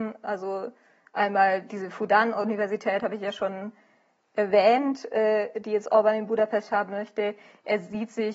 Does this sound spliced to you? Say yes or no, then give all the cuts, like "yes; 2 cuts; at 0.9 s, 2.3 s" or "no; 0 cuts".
no; 0 cuts